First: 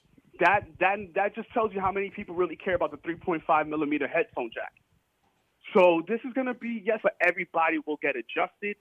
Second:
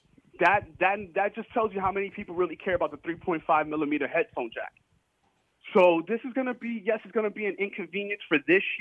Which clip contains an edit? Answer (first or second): first